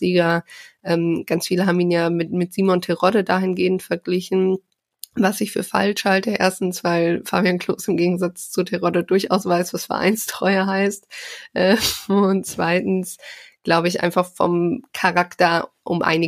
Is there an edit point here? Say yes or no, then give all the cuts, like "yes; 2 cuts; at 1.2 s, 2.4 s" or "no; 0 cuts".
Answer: no; 0 cuts